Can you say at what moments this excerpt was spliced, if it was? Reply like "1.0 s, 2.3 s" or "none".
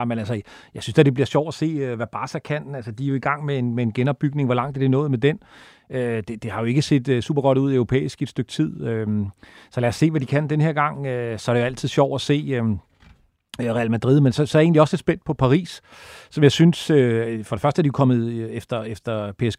none